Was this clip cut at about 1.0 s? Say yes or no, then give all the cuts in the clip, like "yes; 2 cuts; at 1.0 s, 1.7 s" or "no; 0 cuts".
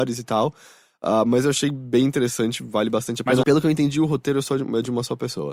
no; 1 cut; at 3.4 s